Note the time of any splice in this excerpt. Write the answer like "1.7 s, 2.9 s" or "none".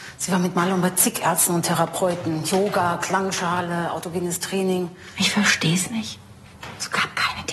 none